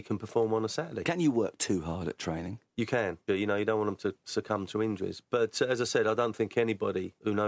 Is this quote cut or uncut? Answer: cut